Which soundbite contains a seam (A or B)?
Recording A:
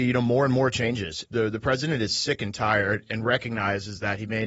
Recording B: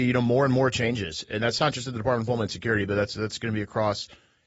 A